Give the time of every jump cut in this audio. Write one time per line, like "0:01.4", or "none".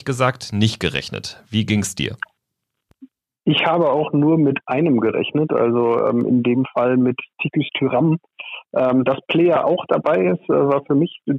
none